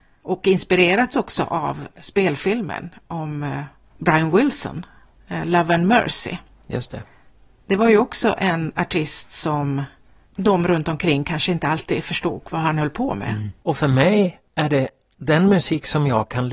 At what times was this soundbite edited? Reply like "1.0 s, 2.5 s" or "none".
13.6 s